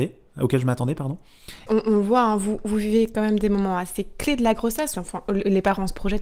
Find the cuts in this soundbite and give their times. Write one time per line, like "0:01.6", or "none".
0:01.7
0:04.9